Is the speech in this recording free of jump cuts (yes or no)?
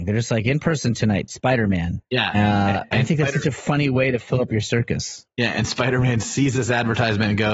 yes